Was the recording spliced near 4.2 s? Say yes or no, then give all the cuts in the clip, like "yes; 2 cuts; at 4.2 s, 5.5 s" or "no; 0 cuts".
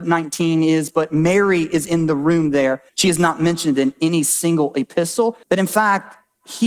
no; 2 cuts; at 2.9 s, 5.4 s